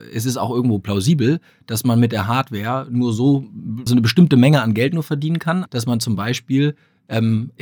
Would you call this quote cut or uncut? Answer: cut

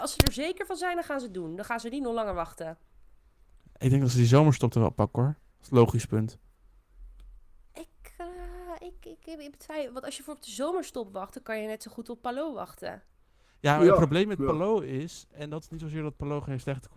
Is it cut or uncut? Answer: uncut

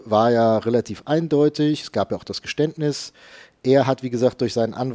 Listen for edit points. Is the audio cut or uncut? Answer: uncut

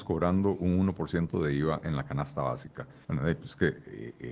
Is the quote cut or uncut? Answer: cut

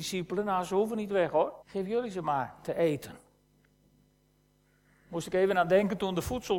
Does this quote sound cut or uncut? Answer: cut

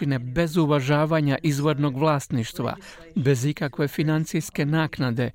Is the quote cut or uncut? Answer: uncut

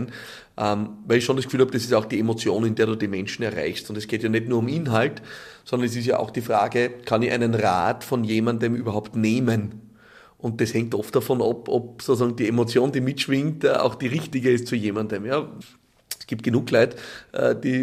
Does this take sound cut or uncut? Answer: uncut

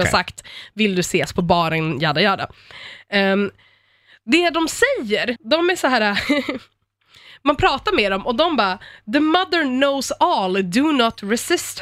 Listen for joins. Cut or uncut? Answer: cut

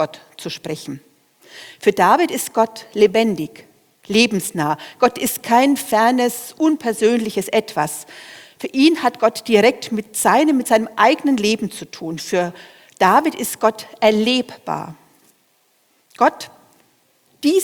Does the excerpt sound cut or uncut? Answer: uncut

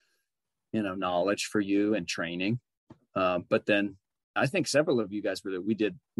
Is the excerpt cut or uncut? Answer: cut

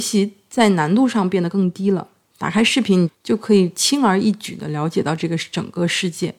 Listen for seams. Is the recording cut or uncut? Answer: cut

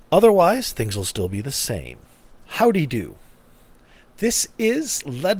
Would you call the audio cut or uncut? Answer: uncut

